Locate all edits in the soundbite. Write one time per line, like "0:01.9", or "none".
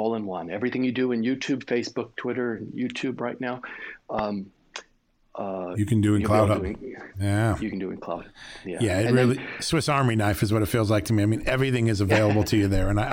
none